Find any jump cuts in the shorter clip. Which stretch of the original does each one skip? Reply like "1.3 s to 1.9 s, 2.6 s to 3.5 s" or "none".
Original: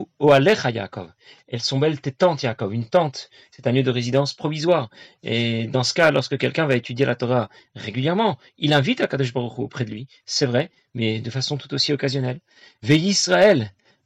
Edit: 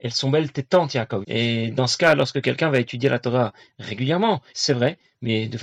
2.7 s to 5.2 s, 8.5 s to 10.2 s